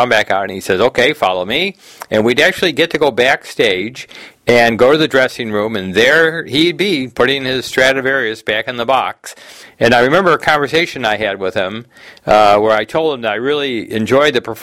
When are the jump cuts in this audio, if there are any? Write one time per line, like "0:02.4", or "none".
0:09.6